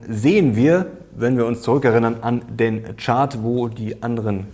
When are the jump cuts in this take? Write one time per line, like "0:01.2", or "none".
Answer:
none